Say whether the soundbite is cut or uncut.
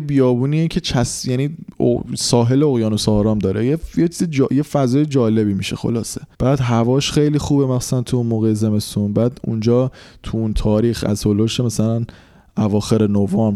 cut